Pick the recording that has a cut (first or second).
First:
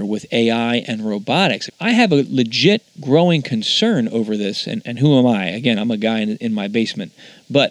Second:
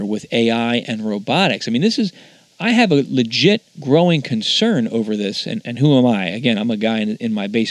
first